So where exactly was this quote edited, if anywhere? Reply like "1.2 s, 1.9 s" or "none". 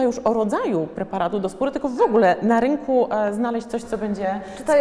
none